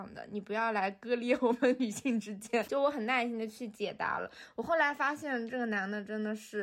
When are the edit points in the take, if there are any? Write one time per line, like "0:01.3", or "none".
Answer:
0:02.6